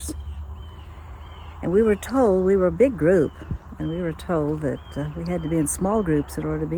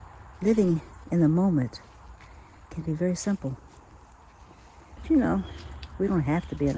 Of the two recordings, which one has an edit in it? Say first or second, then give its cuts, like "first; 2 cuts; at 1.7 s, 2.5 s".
second; 1 cut; at 5.0 s